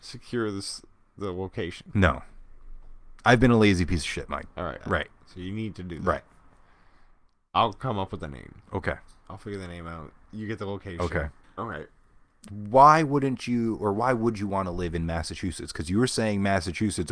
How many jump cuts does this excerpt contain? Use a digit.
2